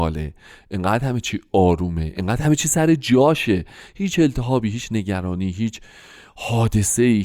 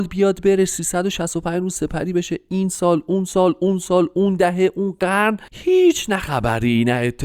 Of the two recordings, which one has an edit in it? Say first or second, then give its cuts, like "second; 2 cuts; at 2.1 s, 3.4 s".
second; 1 cut; at 5.5 s